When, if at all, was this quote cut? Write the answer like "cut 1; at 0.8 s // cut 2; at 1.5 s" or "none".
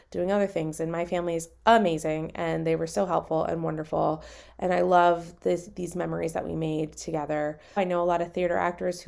cut 1; at 7.8 s